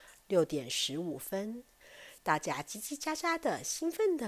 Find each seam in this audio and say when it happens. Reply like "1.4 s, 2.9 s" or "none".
2.2 s